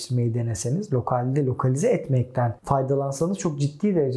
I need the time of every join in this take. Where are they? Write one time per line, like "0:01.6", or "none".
0:02.6